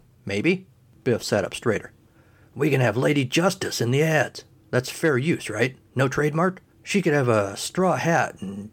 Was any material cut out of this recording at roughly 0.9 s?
yes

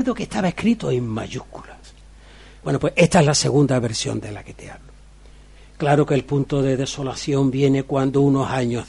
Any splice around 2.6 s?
yes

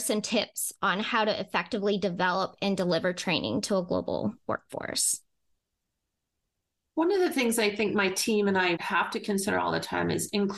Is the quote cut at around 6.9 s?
no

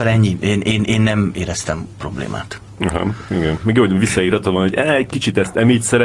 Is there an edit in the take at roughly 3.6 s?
no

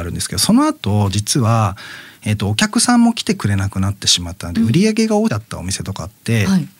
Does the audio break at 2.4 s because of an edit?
no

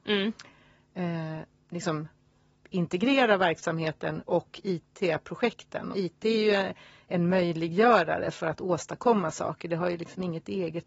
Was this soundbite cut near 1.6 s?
yes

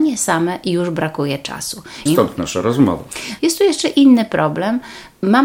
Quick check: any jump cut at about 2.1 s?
yes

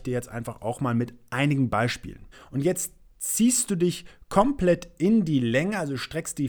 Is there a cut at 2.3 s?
yes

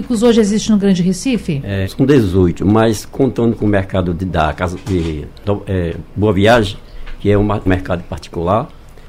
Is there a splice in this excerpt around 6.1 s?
no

